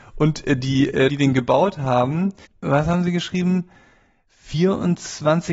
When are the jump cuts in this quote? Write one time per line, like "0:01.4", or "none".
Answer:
0:01.1
0:02.5